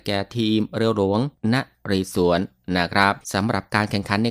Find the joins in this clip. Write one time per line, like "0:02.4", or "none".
0:03.2